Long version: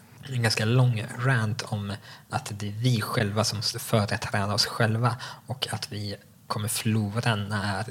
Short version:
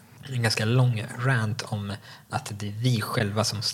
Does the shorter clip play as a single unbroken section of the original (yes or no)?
yes